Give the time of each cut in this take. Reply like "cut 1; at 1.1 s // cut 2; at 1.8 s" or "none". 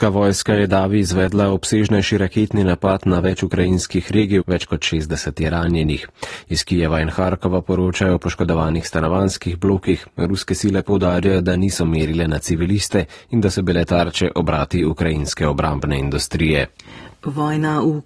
cut 1; at 4.4 s